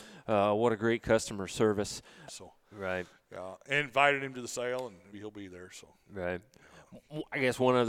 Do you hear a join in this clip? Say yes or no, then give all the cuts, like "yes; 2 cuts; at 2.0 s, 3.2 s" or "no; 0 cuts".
yes; 2 cuts; at 2.3 s, 5.1 s